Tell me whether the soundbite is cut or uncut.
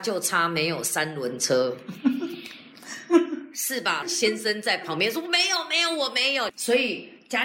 cut